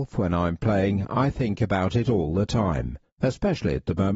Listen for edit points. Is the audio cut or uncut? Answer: cut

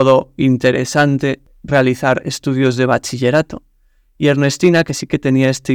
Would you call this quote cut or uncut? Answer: uncut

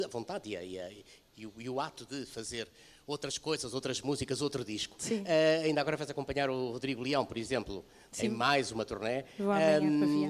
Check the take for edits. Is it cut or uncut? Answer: uncut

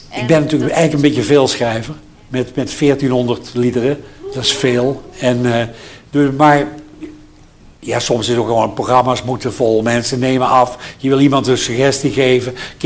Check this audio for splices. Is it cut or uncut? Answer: uncut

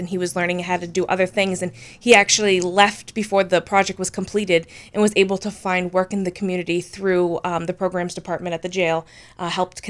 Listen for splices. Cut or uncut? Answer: uncut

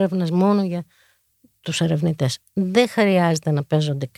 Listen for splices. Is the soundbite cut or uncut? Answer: cut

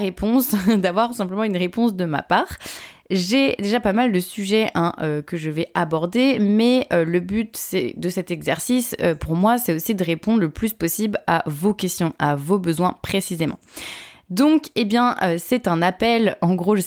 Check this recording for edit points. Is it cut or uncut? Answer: uncut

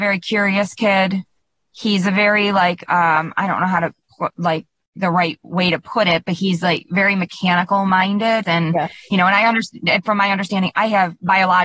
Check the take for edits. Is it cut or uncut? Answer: cut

